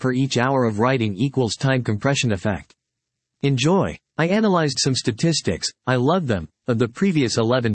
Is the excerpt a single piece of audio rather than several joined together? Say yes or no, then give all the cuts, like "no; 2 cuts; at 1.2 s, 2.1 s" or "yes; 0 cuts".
yes; 0 cuts